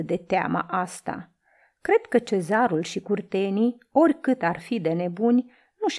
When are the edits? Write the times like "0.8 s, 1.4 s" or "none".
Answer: none